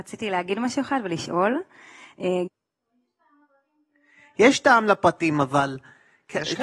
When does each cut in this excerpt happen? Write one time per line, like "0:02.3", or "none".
0:02.5